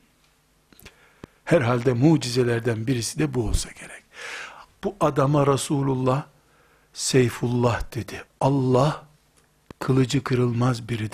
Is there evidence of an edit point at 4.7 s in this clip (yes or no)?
yes